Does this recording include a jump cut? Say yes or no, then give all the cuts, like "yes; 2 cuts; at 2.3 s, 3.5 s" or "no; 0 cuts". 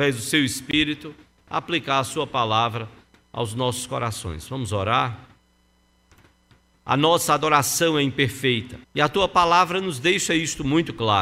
yes; 2 cuts; at 6.7 s, 8.8 s